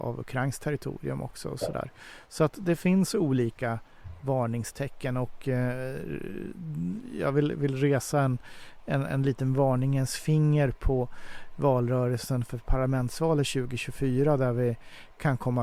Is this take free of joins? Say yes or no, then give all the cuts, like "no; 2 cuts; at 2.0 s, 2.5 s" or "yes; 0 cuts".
yes; 0 cuts